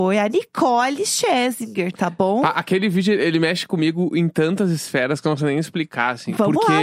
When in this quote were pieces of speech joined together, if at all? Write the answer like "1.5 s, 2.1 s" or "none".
none